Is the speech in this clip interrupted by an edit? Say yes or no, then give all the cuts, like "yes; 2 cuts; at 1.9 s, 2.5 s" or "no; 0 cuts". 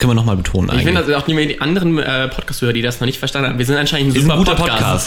no; 0 cuts